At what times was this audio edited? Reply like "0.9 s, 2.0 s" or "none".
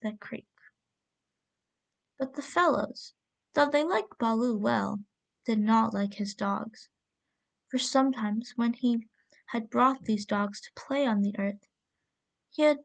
none